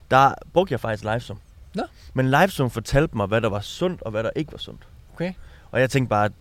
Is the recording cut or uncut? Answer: uncut